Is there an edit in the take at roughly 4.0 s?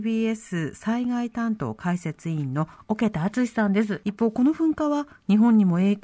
yes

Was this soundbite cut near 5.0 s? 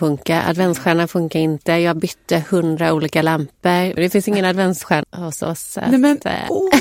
yes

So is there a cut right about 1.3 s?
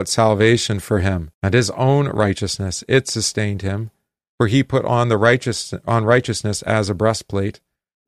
yes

